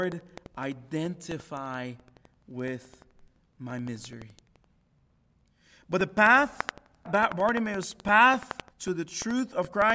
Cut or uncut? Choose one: cut